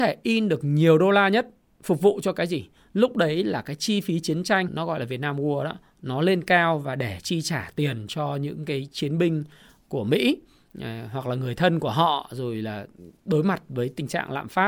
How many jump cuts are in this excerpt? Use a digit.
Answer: 1